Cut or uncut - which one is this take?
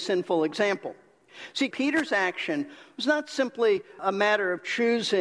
cut